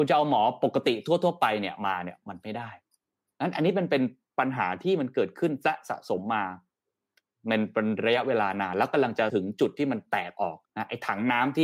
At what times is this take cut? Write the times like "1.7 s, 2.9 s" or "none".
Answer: 10.7 s